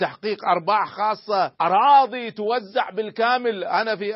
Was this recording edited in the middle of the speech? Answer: yes; 1 cut; at 1.6 s

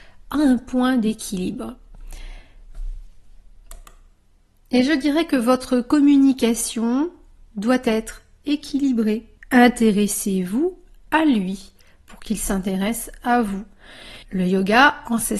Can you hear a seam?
yes; 2 cuts; at 9.4 s, 14.2 s

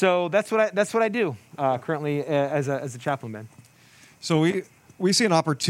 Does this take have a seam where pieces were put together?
no; 0 cuts

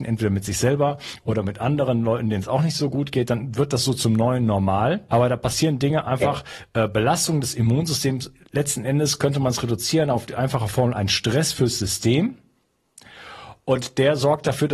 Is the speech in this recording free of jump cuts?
no; 1 cut; at 5.1 s

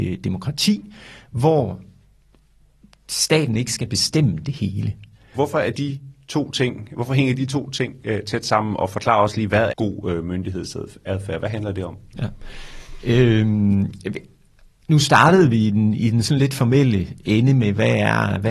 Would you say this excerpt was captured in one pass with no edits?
no; 2 cuts; at 5.3 s, 9.7 s

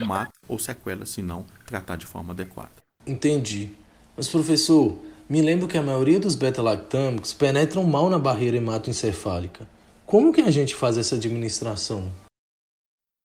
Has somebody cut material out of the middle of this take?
no; 0 cuts

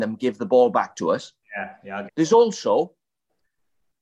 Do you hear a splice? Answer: yes; 1 cut; at 2.1 s

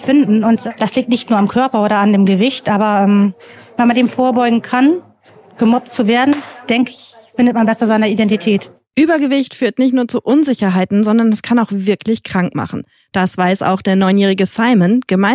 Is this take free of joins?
yes; 0 cuts

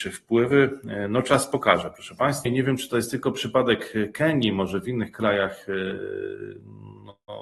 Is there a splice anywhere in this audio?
yes; 1 cut; at 2.5 s

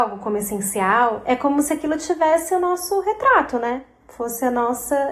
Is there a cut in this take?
no; 0 cuts

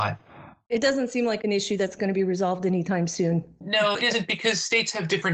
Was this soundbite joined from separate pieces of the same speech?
no; 0 cuts

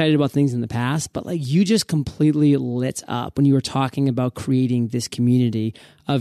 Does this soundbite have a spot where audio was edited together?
no; 0 cuts

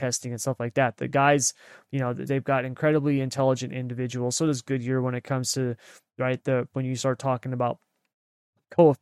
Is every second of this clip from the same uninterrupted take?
no; 1 cut; at 2.3 s

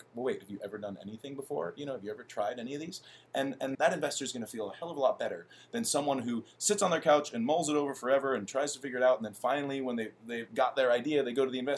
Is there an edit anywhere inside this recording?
yes; 2 cuts; at 3.7 s, 10.5 s

